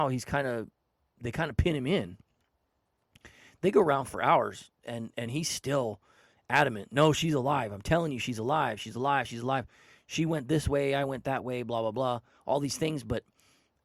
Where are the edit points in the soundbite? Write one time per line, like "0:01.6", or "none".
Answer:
none